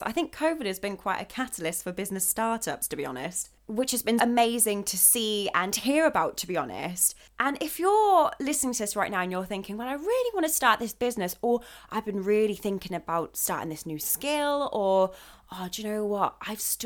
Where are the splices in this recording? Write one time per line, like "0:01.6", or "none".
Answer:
0:04.2